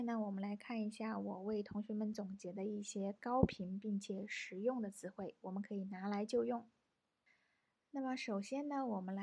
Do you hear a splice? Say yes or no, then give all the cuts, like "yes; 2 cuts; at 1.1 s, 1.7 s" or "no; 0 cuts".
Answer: no; 0 cuts